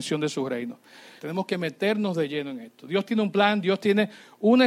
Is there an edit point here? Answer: yes; 1 cut; at 1.2 s

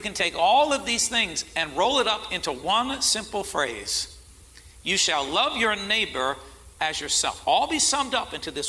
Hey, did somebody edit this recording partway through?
no; 0 cuts

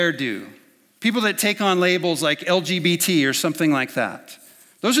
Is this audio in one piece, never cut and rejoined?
yes; 0 cuts

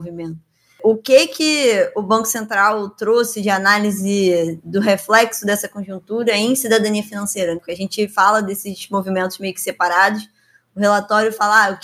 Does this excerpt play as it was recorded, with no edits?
yes; 0 cuts

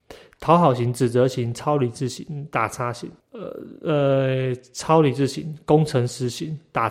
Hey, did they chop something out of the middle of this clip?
yes; 1 cut; at 3.2 s

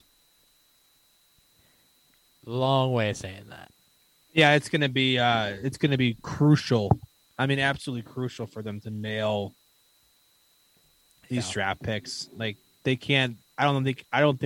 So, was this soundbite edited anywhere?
no; 0 cuts

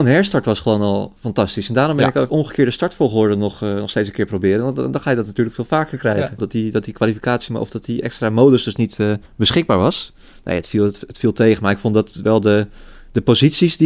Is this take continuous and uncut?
no; 3 cuts; at 2.3 s, 6.4 s, 9.3 s

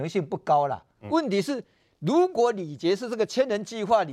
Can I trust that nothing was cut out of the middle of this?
yes; 0 cuts

